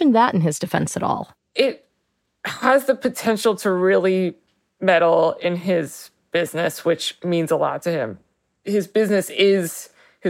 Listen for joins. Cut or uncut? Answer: cut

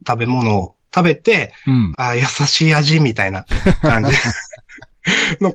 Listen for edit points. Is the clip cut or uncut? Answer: cut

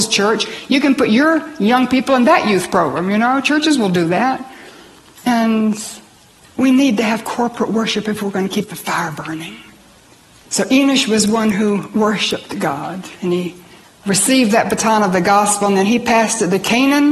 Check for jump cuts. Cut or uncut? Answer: uncut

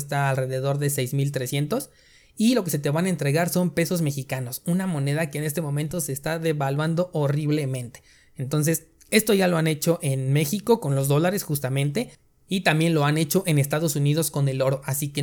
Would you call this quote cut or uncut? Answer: uncut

